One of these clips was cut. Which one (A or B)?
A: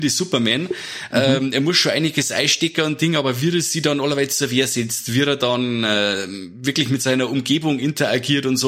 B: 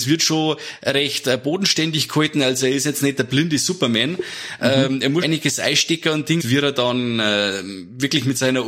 B